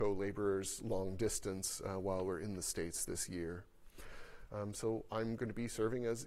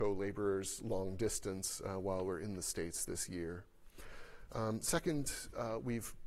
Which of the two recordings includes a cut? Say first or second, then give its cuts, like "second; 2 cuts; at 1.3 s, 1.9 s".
first; 1 cut; at 4.5 s